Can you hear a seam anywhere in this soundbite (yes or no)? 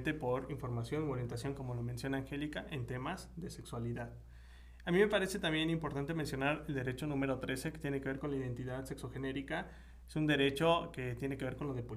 no